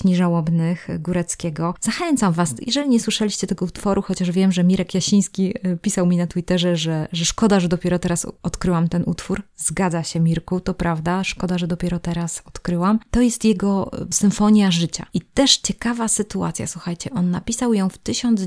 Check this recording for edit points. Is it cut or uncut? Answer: uncut